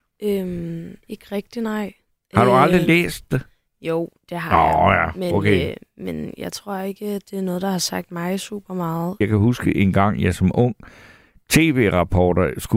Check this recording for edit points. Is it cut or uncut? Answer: cut